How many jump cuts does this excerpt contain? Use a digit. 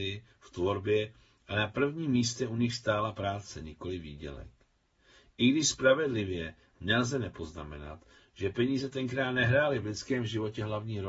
0